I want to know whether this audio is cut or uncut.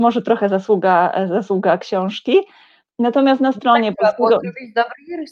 uncut